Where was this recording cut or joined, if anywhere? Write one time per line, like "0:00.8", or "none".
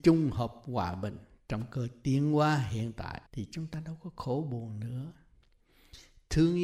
0:03.3